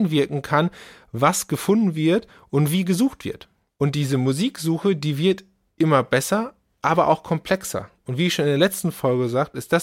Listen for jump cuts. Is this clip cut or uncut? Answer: uncut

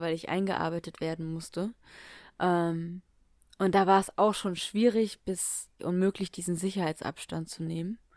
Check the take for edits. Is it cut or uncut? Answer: cut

